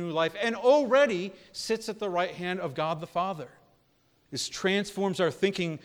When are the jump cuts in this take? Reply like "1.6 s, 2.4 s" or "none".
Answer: 4.3 s